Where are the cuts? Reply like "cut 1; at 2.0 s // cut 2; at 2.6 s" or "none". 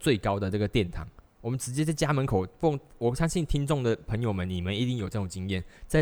cut 1; at 1.3 s